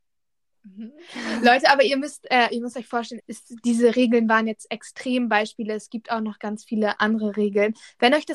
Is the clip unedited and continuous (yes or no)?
no